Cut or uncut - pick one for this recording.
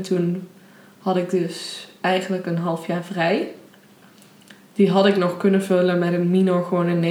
uncut